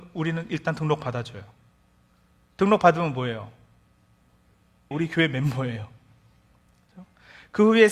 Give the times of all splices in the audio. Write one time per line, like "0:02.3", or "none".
0:04.9

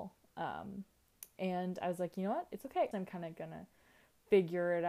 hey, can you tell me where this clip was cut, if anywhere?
0:02.9

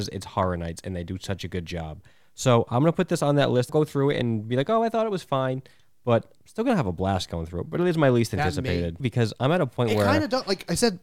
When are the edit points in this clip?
0:03.7
0:09.0

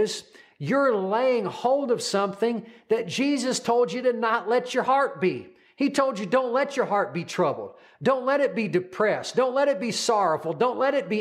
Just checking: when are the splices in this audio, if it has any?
none

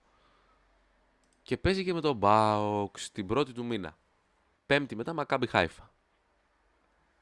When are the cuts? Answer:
0:04.6

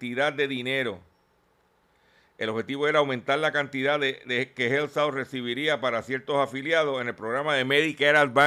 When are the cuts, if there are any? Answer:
none

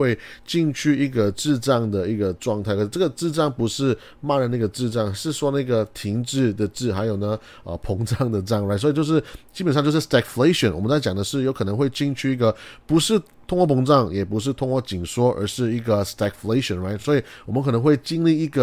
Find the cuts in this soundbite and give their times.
none

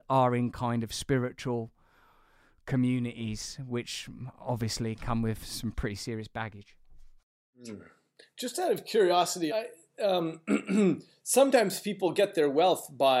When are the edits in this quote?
0:09.5

